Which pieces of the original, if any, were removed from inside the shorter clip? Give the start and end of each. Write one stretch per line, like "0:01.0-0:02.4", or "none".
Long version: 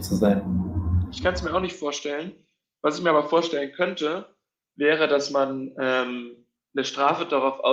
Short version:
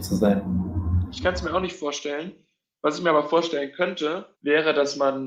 0:04.3-0:04.7